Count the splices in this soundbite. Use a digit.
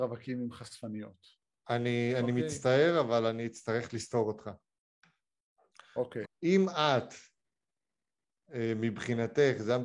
1